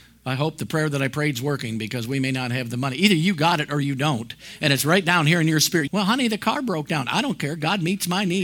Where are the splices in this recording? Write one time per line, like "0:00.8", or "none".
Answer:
0:05.9